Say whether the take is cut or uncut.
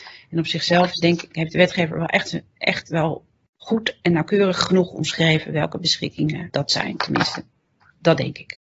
uncut